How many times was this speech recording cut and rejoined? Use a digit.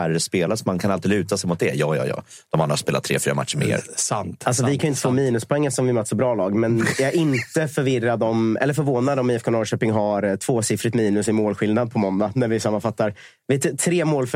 0